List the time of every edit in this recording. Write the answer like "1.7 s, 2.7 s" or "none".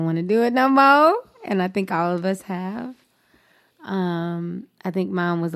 none